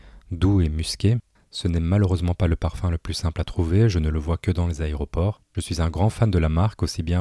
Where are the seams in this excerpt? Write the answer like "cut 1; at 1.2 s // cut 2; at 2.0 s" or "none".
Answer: cut 1; at 1.3 s // cut 2; at 5.5 s

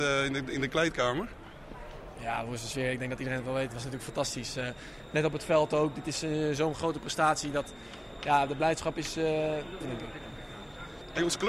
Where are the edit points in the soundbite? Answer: cut 1; at 9.8 s

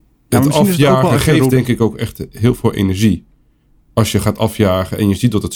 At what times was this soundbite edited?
none

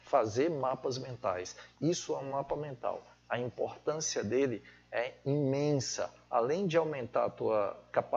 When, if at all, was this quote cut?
cut 1; at 1.7 s

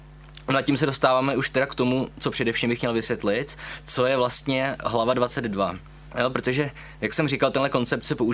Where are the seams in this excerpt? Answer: none

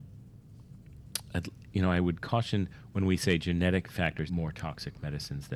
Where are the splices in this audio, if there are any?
cut 1; at 4.3 s

